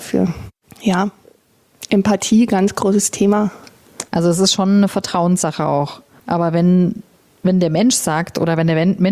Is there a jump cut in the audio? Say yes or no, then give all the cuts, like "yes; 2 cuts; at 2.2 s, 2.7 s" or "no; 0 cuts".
yes; 2 cuts; at 4.1 s, 6.2 s